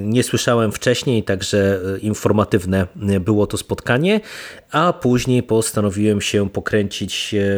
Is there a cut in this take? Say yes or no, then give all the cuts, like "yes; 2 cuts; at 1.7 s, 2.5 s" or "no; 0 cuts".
no; 0 cuts